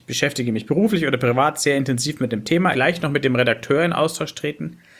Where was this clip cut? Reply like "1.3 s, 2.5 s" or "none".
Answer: 2.7 s